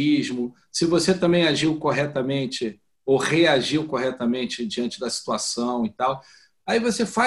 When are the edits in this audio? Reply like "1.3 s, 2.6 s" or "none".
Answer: none